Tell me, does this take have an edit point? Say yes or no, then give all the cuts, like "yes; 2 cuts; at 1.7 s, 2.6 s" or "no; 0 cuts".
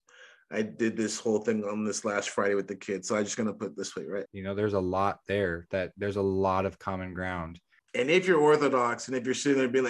yes; 2 cuts; at 4.3 s, 7.8 s